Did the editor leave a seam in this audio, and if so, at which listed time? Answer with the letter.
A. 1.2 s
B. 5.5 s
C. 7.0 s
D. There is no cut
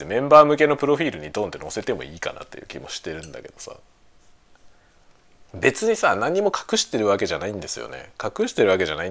B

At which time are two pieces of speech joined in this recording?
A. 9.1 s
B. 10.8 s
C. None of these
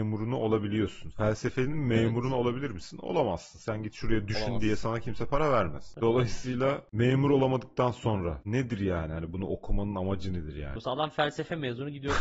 B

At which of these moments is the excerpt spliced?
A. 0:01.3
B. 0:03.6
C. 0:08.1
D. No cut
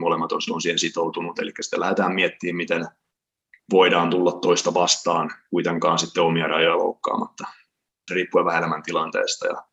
C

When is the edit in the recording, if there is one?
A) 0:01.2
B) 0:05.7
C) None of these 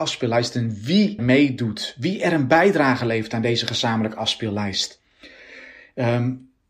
A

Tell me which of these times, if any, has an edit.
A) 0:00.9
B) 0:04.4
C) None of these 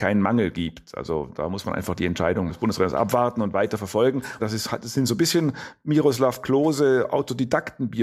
B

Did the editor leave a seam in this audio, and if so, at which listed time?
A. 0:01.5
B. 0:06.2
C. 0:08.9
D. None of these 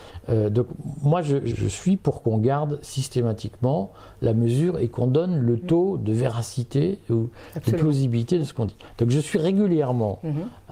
A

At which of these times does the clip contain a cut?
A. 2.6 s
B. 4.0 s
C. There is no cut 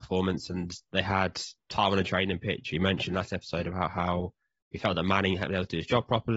C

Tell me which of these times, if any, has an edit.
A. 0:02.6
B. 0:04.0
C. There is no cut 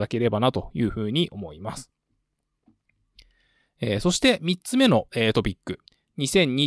C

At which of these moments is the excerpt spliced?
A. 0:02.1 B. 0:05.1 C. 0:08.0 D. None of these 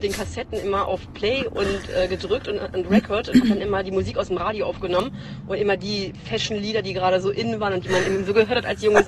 D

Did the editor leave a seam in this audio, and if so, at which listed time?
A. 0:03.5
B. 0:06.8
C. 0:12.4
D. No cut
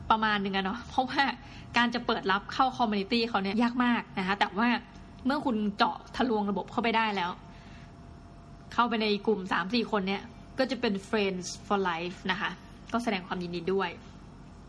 A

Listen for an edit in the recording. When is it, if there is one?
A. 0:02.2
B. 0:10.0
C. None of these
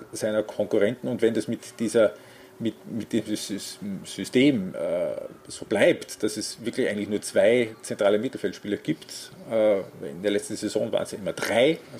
C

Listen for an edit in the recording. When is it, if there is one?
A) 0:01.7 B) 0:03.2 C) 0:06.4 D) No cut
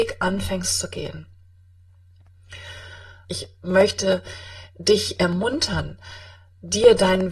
B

